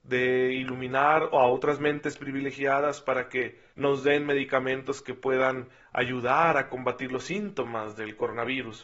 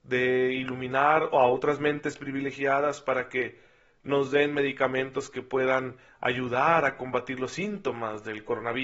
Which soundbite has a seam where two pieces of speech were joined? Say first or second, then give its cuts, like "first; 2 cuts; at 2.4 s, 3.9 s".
first; 1 cut; at 3.7 s